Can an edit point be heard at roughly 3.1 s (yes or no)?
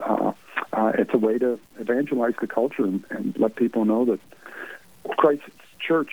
no